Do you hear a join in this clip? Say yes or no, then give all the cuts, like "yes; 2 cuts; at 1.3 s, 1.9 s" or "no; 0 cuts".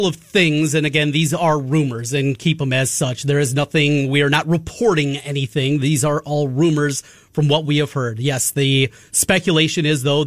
no; 0 cuts